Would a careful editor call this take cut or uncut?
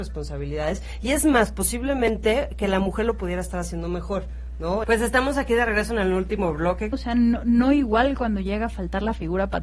cut